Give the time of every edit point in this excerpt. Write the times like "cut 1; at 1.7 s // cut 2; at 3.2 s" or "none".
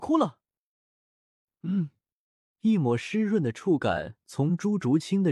cut 1; at 2.5 s